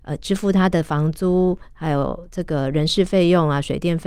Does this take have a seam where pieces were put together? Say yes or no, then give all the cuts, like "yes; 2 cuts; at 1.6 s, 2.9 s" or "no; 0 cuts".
no; 0 cuts